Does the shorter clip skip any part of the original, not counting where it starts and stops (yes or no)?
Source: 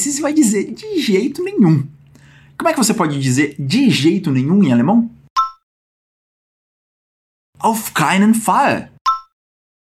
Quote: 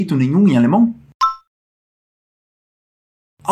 no